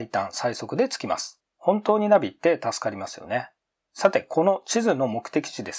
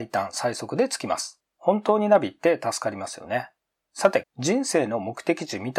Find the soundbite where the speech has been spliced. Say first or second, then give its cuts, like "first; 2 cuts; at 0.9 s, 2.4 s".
second; 1 cut; at 4.2 s